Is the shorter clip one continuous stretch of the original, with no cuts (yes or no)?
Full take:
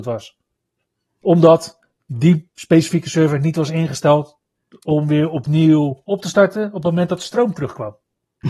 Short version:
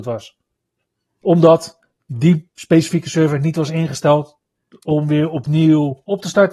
yes